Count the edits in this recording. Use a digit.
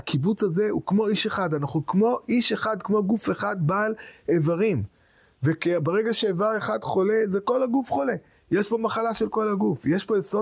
0